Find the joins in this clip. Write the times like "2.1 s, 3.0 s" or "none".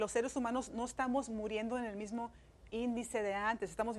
2.7 s